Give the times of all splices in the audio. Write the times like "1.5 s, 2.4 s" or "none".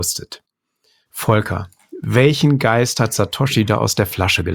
none